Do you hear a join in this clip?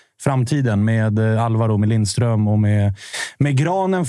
no; 0 cuts

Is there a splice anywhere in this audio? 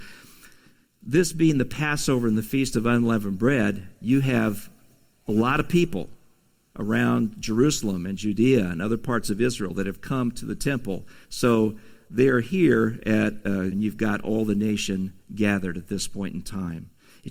yes; 2 cuts; at 11.2 s, 13.7 s

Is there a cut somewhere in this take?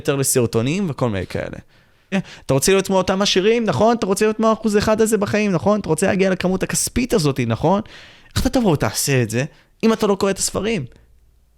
yes; 1 cut; at 2.1 s

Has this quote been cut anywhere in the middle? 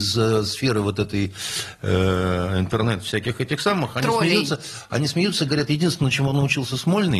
no; 0 cuts

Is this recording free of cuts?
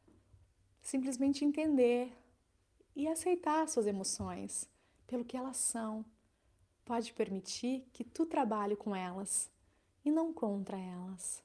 yes; 0 cuts

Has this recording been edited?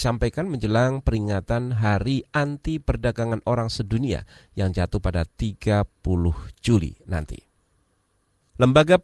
no; 0 cuts

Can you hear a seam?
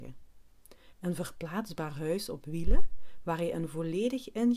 yes; 1 cut; at 0.9 s

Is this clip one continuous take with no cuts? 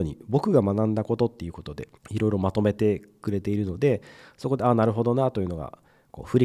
no; 1 cut; at 2.0 s

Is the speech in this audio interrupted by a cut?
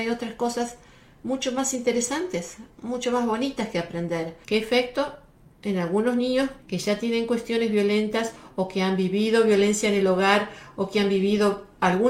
yes; 2 cuts; at 4.4 s, 6.6 s

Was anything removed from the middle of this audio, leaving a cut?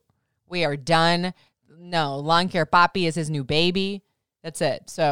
no; 0 cuts

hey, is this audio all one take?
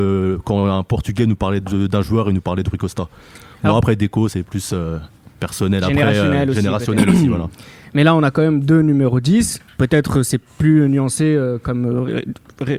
yes; 0 cuts

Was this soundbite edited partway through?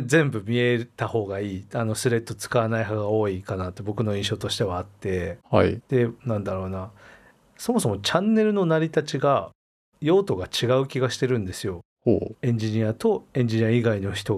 yes; 1 cut; at 6.2 s

